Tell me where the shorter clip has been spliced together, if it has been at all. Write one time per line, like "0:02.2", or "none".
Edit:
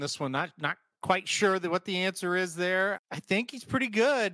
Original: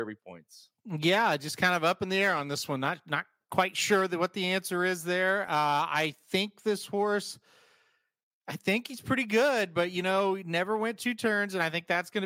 0:03.0